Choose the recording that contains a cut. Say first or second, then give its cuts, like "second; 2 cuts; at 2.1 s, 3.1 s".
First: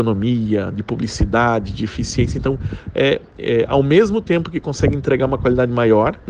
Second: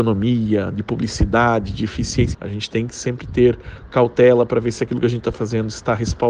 second; 1 cut; at 2.3 s